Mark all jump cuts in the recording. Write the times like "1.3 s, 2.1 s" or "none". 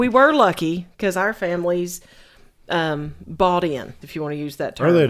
4.0 s